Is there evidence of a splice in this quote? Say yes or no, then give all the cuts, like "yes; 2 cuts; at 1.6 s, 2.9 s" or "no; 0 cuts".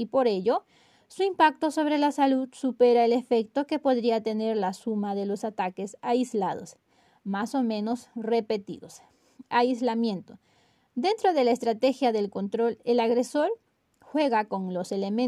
no; 0 cuts